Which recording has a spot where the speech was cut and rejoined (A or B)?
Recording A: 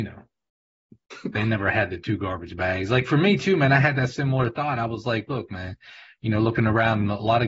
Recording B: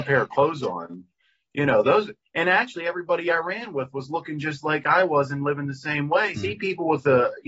B